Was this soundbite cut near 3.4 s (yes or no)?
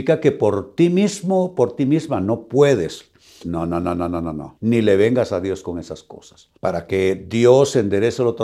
yes